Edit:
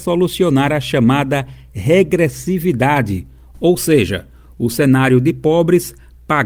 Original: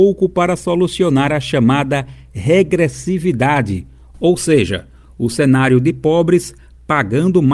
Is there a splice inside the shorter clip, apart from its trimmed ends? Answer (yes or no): no